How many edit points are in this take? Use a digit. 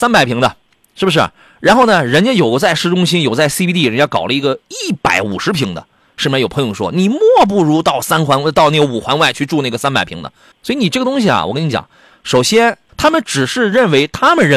2